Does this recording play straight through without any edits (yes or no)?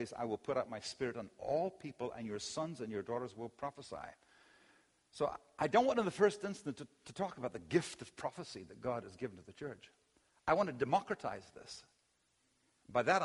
yes